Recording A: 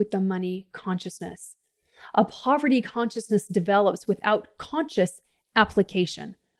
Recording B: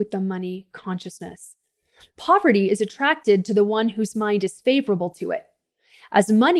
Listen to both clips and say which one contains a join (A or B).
B